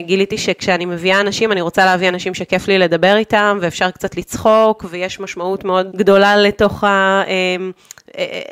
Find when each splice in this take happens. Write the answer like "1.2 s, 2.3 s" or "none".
5.9 s